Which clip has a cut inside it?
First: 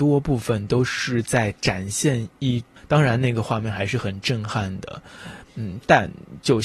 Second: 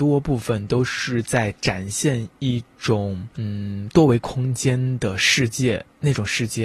first; 1 cut; at 2.8 s

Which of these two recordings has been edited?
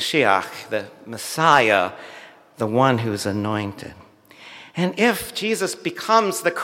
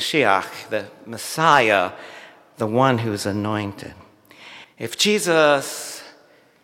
second; 1 cut; at 4.6 s

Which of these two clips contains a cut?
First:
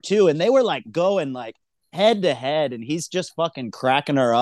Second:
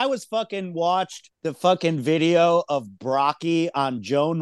second; 1 cut; at 1.3 s

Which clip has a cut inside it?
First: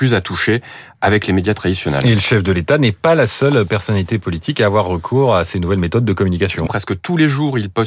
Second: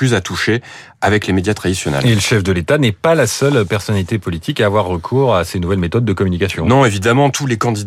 first; 1 cut; at 6.7 s

